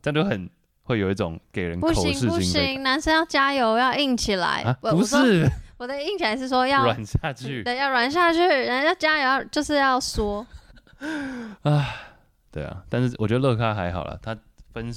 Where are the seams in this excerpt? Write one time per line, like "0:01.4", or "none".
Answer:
0:10.7